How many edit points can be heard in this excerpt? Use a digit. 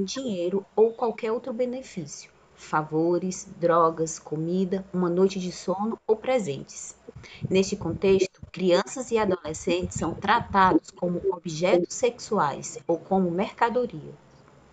0